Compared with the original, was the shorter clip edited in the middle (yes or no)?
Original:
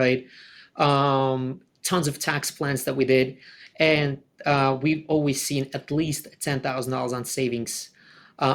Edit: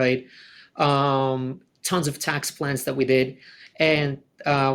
no